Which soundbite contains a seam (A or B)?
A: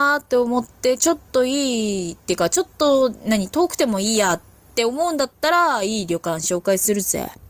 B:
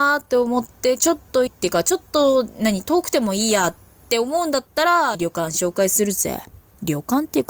B